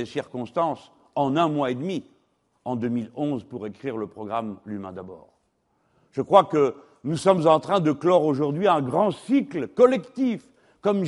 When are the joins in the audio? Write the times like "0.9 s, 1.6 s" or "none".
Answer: none